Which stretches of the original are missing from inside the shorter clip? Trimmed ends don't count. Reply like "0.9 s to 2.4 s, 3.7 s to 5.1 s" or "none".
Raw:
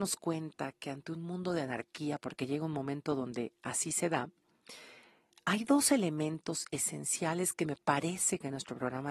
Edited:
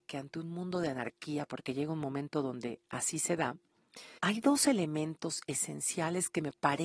4.9 s to 5.4 s